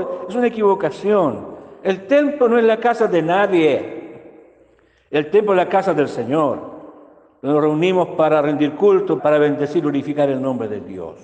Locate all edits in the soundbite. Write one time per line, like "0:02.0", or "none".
0:09.2